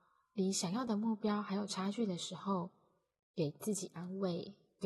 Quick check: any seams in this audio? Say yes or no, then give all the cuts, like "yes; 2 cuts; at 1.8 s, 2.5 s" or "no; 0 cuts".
no; 0 cuts